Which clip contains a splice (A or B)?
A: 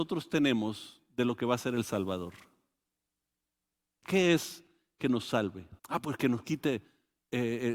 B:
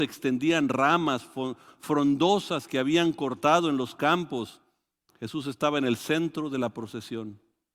A